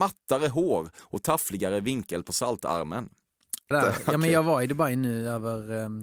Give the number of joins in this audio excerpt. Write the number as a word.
one